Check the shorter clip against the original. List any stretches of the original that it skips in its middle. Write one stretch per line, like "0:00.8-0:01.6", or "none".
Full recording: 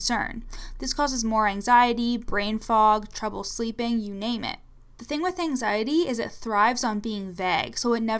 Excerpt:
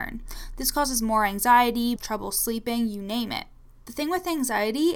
0:02.2-0:03.1